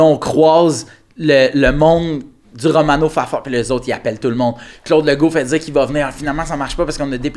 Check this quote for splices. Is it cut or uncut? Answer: uncut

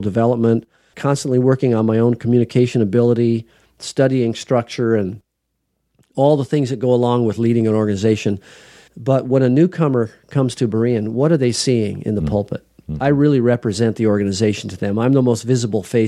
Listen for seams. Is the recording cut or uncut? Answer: cut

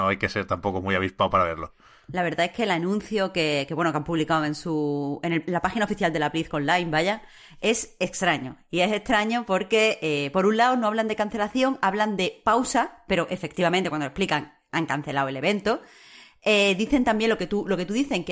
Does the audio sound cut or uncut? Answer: uncut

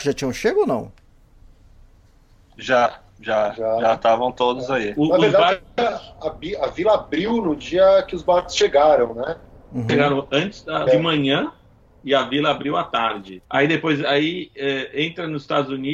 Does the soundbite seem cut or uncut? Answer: cut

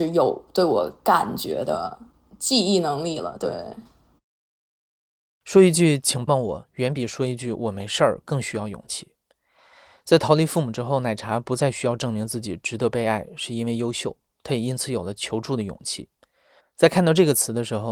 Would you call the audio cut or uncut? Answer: cut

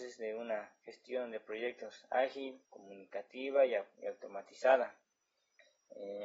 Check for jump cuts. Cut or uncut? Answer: cut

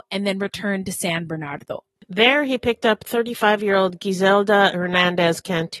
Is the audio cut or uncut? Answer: uncut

